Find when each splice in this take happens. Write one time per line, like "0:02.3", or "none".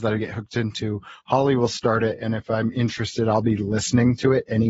none